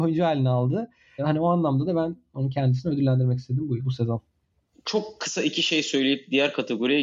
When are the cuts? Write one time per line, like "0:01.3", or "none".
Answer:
0:03.8